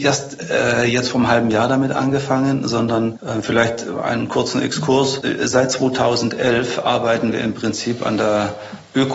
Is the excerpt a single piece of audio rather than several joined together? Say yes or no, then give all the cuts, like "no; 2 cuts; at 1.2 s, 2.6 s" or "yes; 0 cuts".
yes; 0 cuts